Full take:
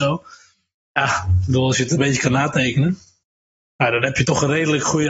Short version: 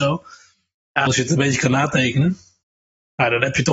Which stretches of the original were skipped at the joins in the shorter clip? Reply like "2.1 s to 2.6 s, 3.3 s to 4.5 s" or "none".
1.1 s to 1.7 s